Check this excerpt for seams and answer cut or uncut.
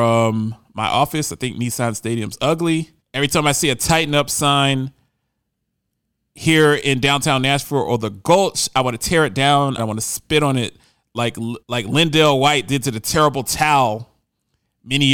cut